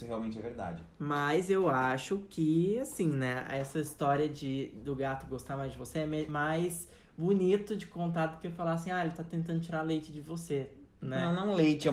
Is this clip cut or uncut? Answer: uncut